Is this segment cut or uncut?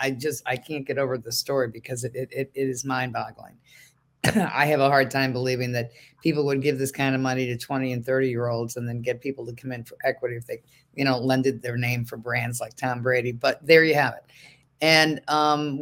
uncut